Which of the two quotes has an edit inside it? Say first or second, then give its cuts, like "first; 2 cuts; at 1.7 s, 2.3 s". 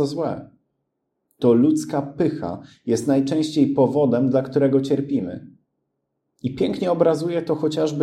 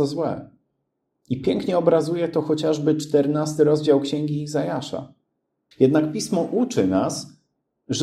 second; 2 cuts; at 1.1 s, 5.7 s